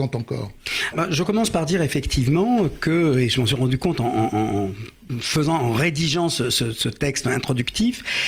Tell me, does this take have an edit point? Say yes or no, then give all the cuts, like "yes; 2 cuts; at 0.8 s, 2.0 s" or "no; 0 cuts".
yes; 1 cut; at 0.9 s